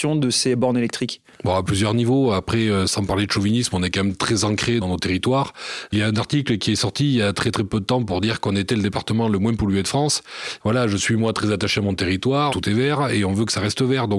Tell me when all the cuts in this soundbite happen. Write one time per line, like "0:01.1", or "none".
0:10.6
0:12.5